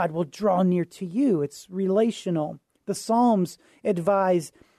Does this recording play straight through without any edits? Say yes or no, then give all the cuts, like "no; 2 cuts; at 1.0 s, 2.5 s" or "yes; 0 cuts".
yes; 0 cuts